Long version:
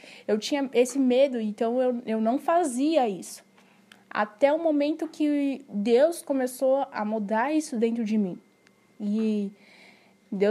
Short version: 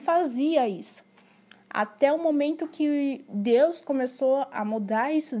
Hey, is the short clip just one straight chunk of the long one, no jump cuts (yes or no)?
yes